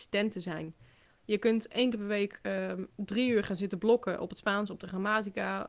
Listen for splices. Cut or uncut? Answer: uncut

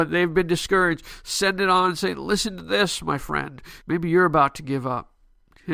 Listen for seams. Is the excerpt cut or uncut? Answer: cut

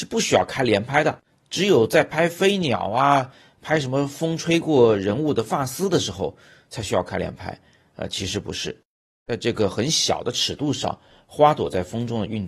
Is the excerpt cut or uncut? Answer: uncut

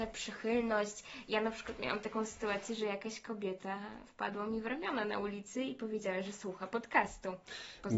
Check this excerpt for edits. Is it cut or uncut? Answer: uncut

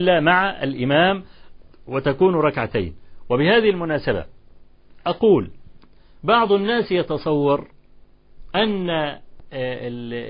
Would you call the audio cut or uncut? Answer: uncut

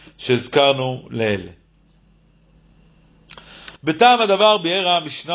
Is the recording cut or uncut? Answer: cut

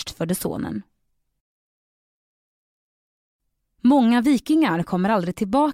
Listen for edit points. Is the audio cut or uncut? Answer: uncut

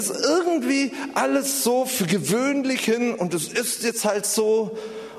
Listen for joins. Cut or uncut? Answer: uncut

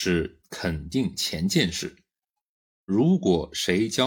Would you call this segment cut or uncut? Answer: uncut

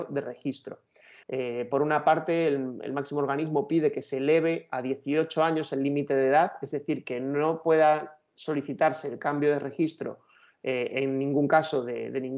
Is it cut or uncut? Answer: cut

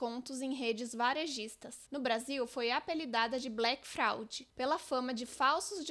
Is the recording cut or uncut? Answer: cut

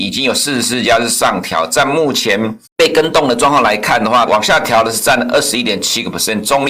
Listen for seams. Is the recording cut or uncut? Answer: cut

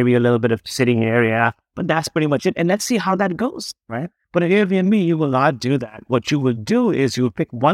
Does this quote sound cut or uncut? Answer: uncut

